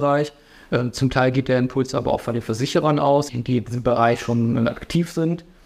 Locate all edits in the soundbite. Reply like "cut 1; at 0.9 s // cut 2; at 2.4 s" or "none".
cut 1; at 3.3 s